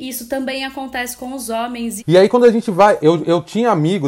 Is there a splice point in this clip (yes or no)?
yes